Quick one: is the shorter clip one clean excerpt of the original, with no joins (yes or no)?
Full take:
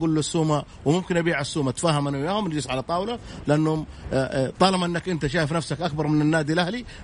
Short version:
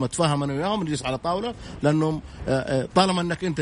yes